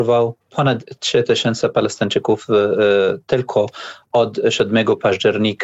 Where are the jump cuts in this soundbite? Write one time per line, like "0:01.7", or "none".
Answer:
none